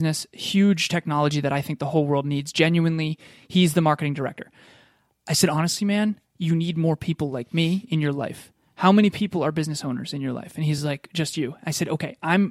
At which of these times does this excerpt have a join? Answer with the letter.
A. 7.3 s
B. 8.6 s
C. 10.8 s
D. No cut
D